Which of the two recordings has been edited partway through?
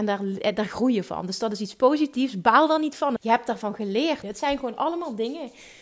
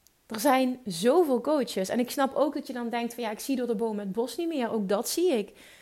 first; 2 cuts; at 3.2 s, 4.2 s

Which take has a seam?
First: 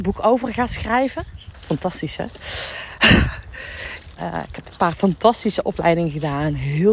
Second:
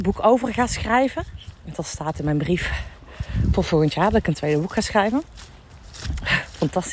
first; 2 cuts; at 1.5 s, 4.1 s

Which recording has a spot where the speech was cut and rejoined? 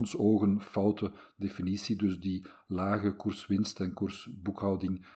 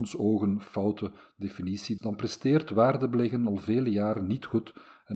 second; 1 cut; at 2.0 s

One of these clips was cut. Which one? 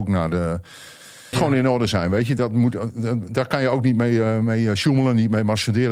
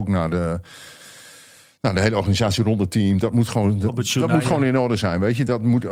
first; 1 cut; at 1.3 s

